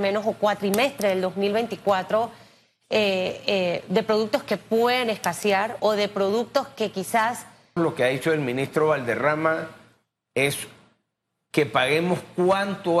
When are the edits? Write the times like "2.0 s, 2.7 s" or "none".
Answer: 5.8 s, 7.8 s